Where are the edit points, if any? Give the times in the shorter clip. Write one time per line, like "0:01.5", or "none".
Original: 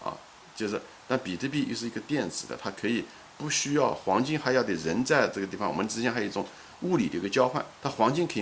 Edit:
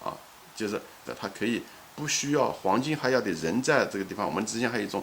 0:01.1